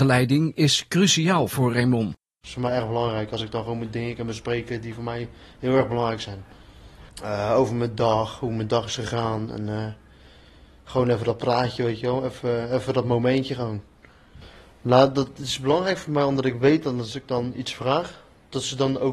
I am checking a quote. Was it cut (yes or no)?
no